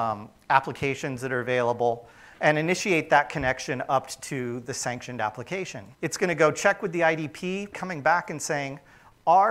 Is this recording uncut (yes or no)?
no